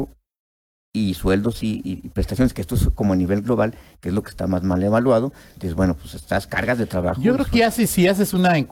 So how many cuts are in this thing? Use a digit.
0